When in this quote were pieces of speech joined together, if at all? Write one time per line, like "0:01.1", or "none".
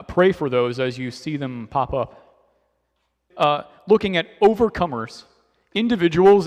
0:03.3